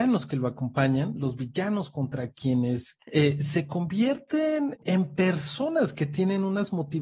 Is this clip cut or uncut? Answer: cut